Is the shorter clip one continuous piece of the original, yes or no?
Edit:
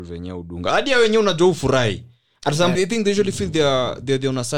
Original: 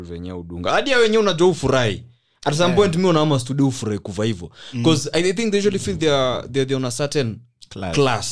no